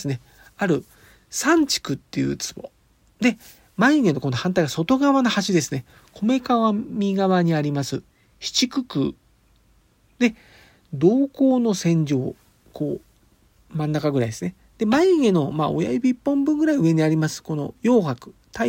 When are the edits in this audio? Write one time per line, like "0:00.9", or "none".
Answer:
none